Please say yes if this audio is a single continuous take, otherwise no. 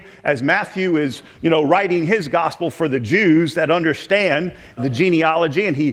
no